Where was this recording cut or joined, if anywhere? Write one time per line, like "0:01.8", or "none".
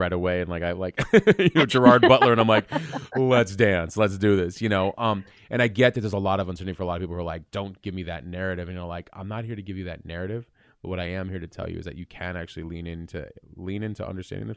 none